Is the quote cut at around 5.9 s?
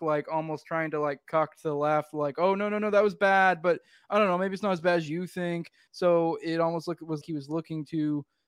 yes; 2 cuts; at 5.9 s, 7.2 s

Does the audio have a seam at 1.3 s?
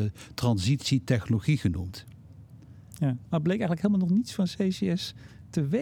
no; 1 cut; at 3.3 s

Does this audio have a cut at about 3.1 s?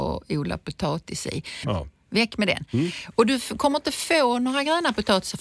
no; 1 cut; at 1.6 s

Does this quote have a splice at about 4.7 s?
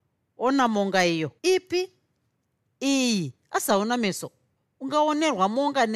no; 1 cut; at 1.4 s

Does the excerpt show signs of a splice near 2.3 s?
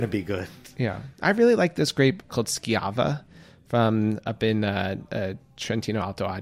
yes; 1 cut; at 2.3 s

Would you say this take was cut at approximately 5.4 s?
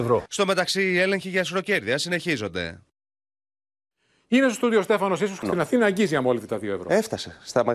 yes; 1 cut; at 5.4 s

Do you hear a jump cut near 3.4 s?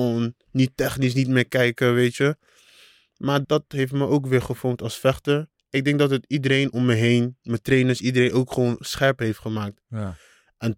yes; 1 cut; at 3.4 s

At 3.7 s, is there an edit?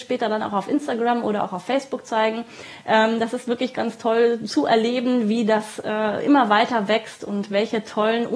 yes; 1 cut; at 3.7 s

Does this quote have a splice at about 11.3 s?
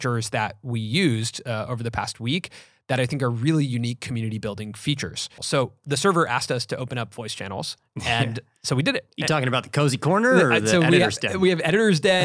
no; 1 cut; at 5.4 s

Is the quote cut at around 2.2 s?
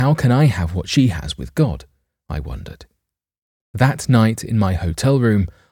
no; 1 cut; at 3.6 s

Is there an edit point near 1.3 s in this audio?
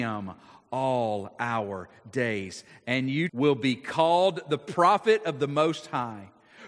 no; 1 cut; at 3.3 s

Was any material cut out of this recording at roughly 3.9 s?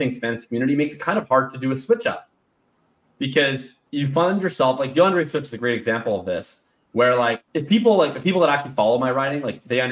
yes; 2 cuts; at 3.9 s, 7.5 s

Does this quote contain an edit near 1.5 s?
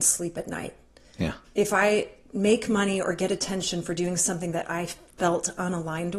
no; 0 cuts

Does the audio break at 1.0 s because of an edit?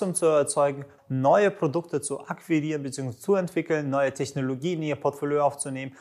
yes; 1 cut; at 1.0 s

